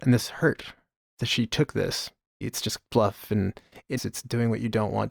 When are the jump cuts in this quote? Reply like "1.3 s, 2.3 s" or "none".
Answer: 2.4 s, 4.0 s